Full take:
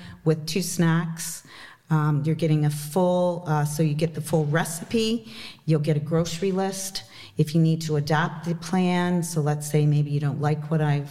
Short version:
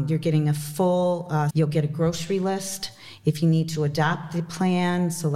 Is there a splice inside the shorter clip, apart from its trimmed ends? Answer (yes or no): yes